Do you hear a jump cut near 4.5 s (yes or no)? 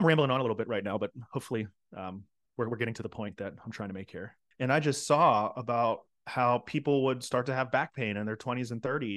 yes